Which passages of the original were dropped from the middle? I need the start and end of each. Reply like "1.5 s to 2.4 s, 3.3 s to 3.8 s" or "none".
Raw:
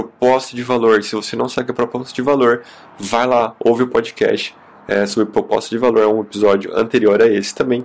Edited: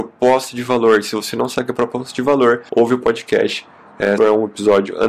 2.7 s to 3.6 s, 5.1 s to 5.9 s